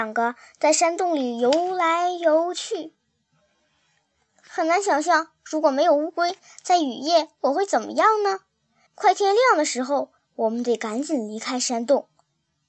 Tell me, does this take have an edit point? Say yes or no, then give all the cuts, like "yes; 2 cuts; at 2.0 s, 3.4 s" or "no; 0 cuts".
yes; 2 cuts; at 8.9 s, 10.2 s